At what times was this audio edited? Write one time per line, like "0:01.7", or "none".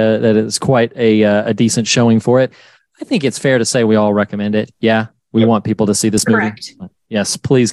none